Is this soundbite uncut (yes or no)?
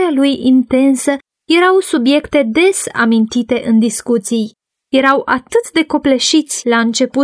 no